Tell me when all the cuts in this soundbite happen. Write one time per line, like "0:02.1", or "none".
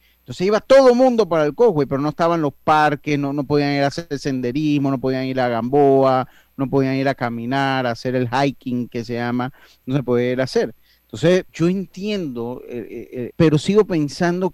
0:11.5
0:13.3